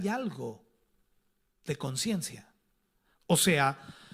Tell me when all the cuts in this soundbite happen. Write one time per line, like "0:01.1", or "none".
0:03.1